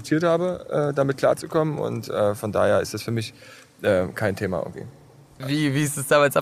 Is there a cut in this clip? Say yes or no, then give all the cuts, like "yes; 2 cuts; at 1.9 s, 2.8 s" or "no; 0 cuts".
yes; 1 cut; at 5.4 s